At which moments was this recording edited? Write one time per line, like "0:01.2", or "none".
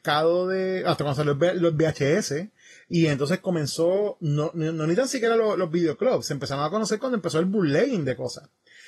none